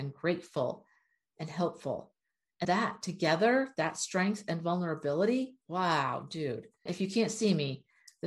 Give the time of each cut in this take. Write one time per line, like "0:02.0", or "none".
0:02.6
0:05.6
0:06.9